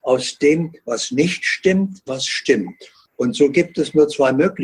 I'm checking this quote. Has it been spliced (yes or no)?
yes